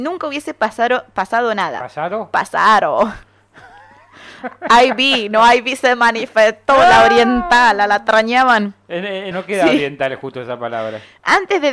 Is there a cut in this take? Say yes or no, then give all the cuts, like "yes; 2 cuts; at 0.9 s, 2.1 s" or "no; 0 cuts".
yes; 1 cut; at 9.3 s